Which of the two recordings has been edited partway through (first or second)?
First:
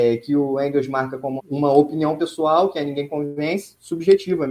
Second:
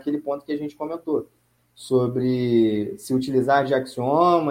first